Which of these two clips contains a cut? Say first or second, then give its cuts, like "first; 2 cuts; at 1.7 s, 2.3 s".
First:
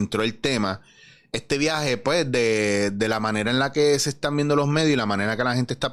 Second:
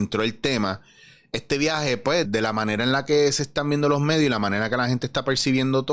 second; 1 cut; at 2.2 s